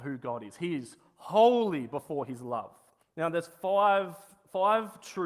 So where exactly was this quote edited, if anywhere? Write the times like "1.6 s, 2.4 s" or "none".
3.0 s

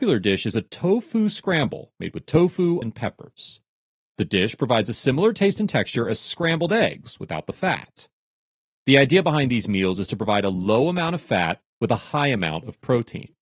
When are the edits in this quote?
2.8 s

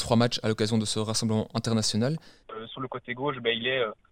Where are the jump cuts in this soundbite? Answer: 2.4 s

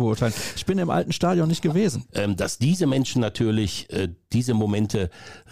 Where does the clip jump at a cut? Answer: 2.1 s

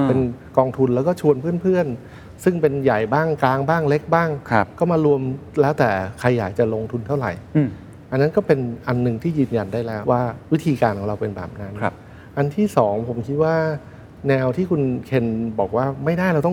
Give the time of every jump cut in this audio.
10.0 s

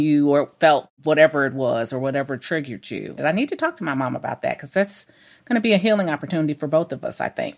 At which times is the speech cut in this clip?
3.2 s

